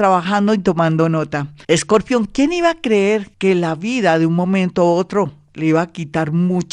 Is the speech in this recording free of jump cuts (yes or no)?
no